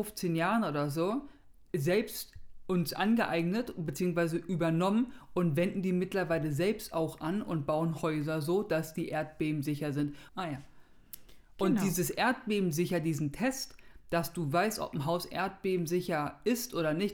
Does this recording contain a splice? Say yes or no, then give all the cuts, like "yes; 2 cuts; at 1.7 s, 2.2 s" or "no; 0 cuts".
yes; 1 cut; at 10.3 s